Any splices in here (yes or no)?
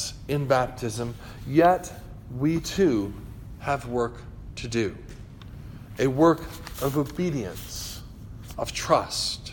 no